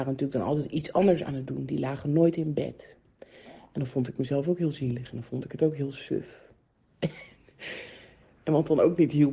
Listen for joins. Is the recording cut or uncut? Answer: uncut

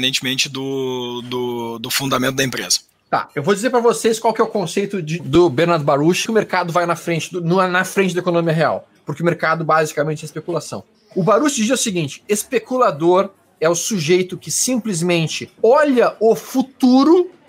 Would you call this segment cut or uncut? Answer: cut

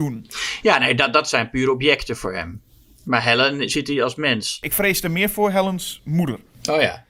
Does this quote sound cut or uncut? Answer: uncut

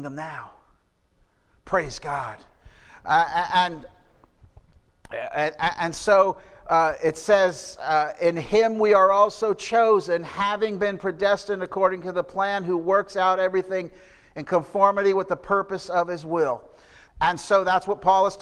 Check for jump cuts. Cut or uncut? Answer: cut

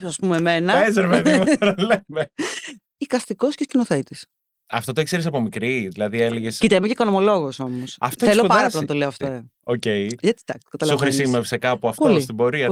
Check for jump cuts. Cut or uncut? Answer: cut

